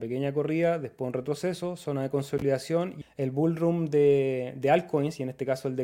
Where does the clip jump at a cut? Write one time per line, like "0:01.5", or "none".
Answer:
0:03.0